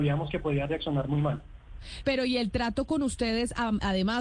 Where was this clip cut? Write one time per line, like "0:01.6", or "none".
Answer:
0:02.0

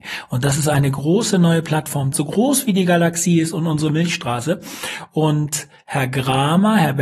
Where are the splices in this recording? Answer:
0:02.1

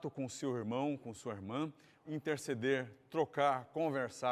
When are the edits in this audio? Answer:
0:02.0

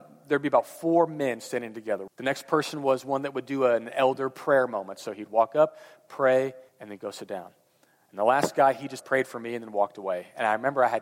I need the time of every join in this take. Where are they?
0:02.1
0:06.7
0:09.0

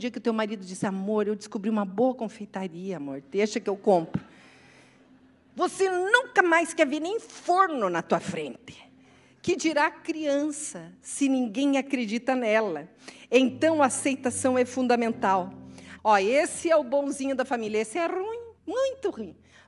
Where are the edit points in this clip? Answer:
0:16.0
0:18.6

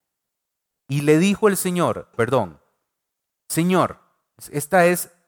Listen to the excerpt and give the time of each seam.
0:02.1

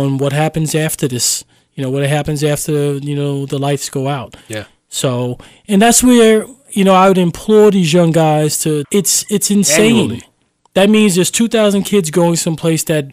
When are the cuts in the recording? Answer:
0:08.8

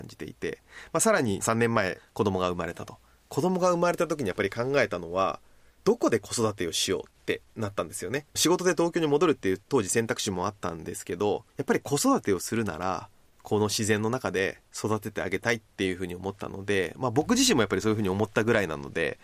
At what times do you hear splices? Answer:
0:08.3
0:11.5

